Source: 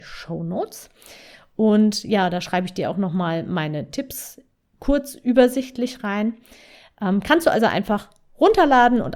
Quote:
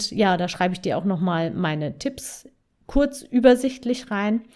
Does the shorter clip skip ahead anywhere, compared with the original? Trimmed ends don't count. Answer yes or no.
no